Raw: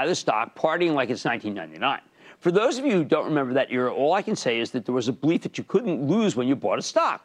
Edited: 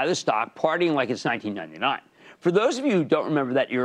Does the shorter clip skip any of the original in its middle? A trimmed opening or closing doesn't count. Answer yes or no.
no